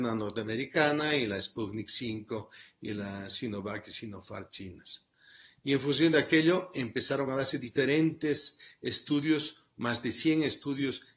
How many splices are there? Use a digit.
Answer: 0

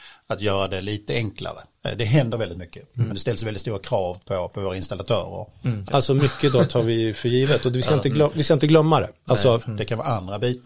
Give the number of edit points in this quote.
3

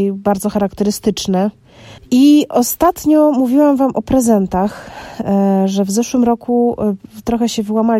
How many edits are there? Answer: 1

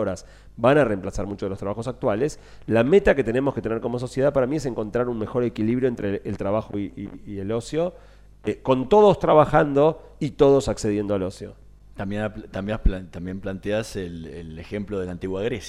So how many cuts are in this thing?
0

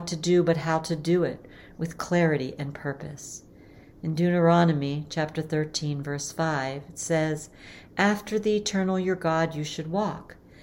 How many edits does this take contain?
0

